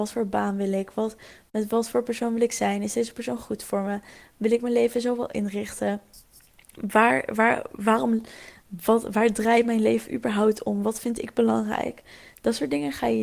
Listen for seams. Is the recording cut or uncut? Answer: uncut